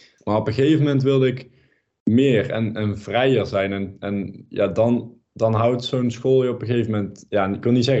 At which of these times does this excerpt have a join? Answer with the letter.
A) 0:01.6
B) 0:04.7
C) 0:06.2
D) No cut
D